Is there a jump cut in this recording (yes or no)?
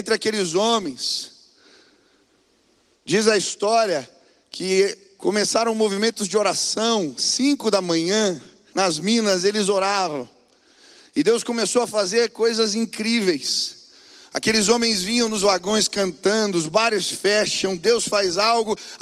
yes